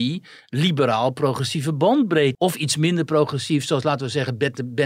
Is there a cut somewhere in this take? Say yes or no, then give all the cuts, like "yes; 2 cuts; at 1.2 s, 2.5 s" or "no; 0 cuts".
yes; 1 cut; at 2.3 s